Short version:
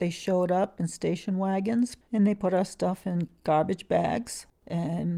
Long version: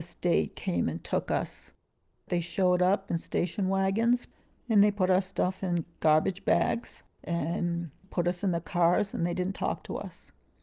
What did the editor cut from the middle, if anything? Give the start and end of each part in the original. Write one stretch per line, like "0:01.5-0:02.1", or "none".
0:04.3-0:04.6